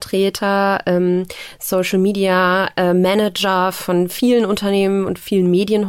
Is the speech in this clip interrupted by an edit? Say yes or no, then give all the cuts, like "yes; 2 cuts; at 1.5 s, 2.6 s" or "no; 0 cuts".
no; 0 cuts